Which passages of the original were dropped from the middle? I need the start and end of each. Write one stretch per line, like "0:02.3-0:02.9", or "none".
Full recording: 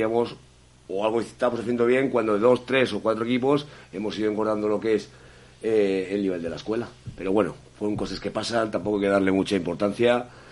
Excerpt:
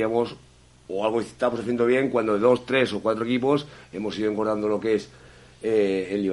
none